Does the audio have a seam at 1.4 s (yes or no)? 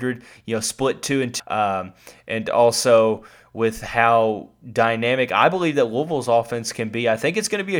yes